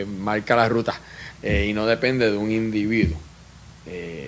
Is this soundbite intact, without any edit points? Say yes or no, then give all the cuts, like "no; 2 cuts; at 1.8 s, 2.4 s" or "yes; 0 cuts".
no; 1 cut; at 1.3 s